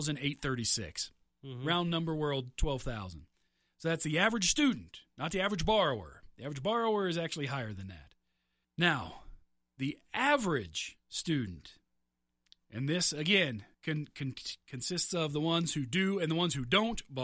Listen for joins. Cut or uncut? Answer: cut